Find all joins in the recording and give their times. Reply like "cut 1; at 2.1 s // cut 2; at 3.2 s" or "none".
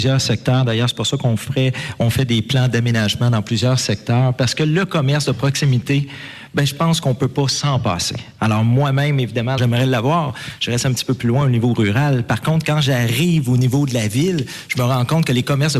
cut 1; at 9.6 s